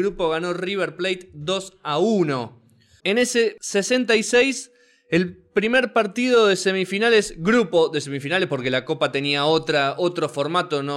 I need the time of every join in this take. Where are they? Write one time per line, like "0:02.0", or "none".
0:03.0